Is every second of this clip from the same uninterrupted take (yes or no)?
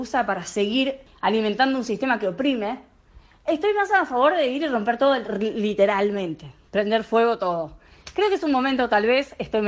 yes